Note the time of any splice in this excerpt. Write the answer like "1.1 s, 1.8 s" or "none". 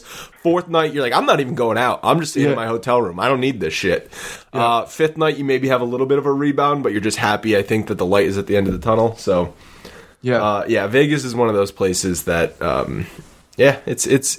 none